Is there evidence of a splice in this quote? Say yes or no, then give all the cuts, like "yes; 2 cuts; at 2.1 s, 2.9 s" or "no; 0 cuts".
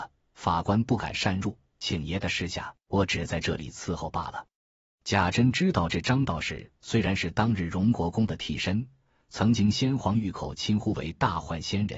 yes; 1 cut; at 2.9 s